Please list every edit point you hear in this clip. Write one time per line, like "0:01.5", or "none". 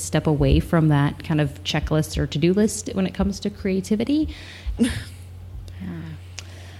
0:04.8